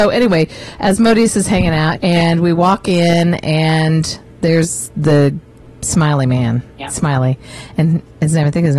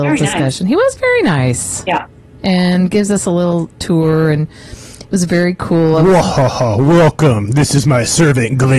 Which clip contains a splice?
first; 2 cuts; at 1.9 s, 6.7 s

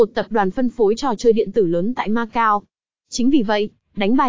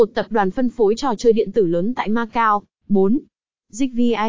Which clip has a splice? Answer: second; 1 cut; at 2.8 s

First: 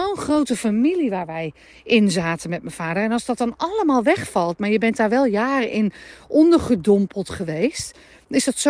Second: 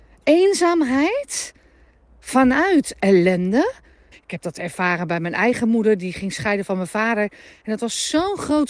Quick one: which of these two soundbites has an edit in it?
second; 1 cut; at 4.1 s

